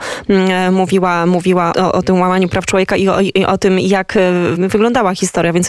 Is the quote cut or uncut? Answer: cut